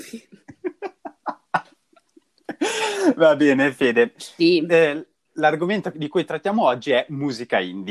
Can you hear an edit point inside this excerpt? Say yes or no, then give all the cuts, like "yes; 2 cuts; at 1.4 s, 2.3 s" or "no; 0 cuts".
yes; 1 cut; at 4.2 s